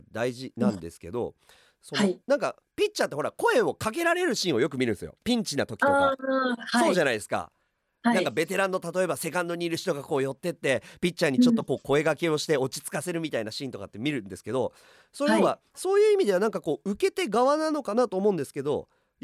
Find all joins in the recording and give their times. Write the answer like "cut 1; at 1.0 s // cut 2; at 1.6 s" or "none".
none